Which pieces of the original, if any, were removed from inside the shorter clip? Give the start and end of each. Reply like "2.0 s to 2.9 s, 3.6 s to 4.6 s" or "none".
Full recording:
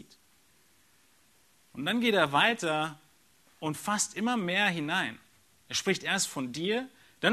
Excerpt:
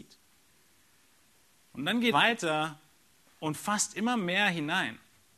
2.1 s to 2.3 s